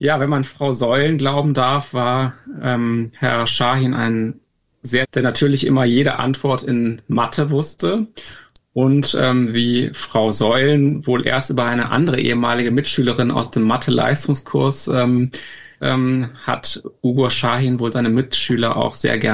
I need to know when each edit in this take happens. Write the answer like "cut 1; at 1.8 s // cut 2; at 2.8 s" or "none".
cut 1; at 5.0 s // cut 2; at 15.8 s